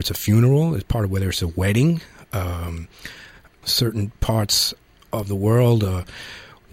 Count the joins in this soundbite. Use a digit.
1